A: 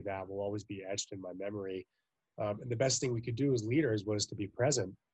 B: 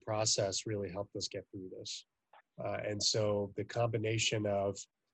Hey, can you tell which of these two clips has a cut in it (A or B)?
B